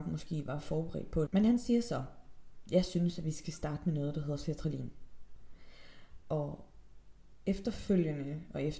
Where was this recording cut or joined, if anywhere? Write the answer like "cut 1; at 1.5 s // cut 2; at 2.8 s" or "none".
cut 1; at 1.3 s